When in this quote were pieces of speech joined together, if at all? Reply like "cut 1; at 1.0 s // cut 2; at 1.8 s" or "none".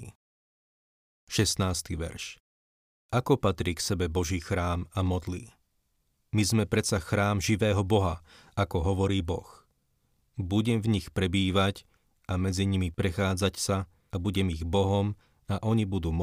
none